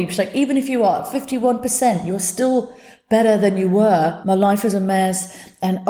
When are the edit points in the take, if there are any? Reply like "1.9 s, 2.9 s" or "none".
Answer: 4.2 s